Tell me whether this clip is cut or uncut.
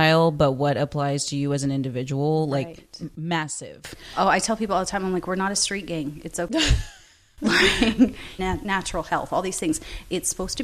cut